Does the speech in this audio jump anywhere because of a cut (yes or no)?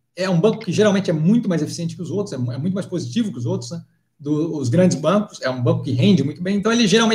no